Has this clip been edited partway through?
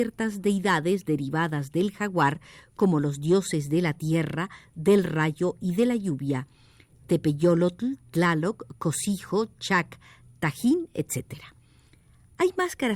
no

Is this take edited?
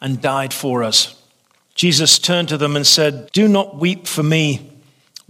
yes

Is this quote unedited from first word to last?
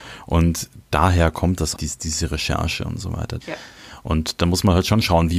no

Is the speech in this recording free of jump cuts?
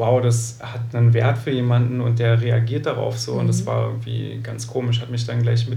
yes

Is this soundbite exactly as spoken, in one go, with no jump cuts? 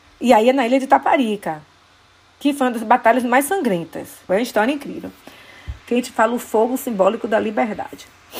no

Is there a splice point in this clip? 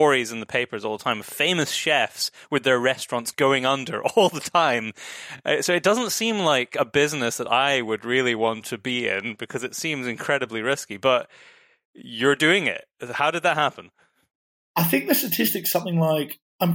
no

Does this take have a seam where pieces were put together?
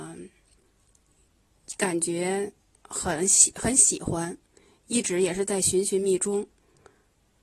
yes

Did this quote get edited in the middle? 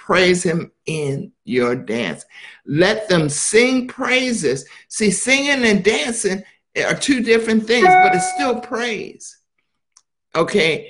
no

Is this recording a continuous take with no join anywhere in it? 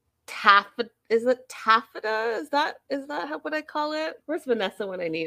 no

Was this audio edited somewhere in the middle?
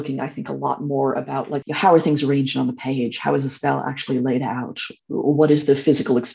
no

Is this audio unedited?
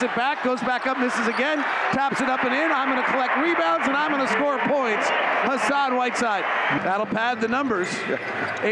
no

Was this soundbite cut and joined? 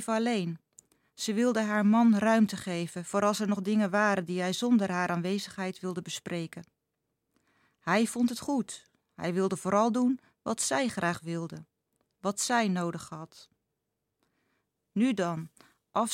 no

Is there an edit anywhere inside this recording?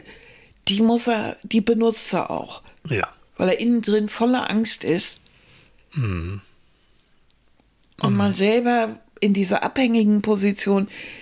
no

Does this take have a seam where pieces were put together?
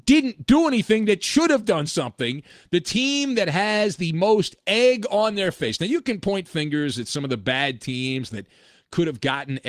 no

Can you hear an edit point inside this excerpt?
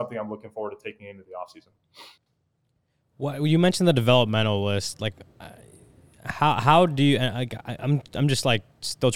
no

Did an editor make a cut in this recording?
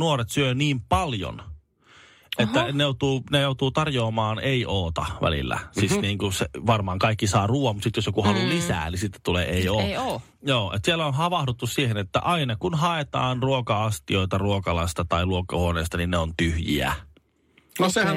no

